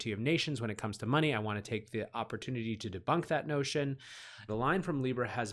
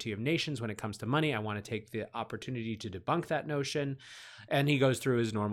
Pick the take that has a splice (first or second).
first